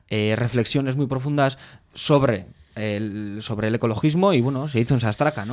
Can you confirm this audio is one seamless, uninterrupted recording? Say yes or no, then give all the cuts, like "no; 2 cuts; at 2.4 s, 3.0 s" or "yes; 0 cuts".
yes; 0 cuts